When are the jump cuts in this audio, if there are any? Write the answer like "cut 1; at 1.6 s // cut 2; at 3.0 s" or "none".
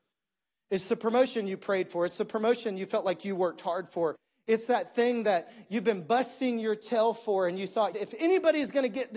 cut 1; at 7.9 s